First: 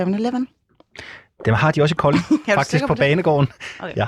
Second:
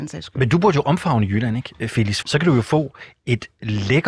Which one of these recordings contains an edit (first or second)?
second